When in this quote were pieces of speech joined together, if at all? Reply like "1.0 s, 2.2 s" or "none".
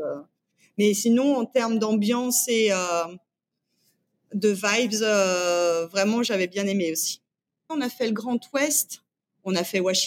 7.7 s